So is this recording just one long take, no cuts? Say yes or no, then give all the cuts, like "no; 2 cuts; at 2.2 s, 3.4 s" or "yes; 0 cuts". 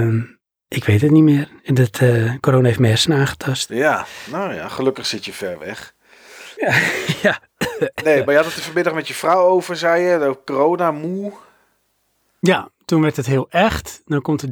yes; 0 cuts